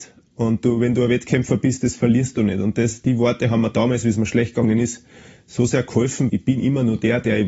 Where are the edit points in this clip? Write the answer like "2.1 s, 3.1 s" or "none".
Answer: 6.3 s

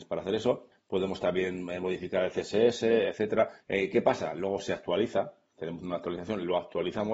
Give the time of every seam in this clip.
3.6 s

